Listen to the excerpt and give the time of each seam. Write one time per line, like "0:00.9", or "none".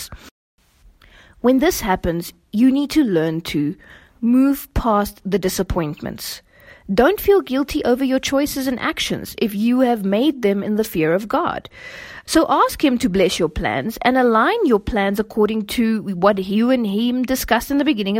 0:12.3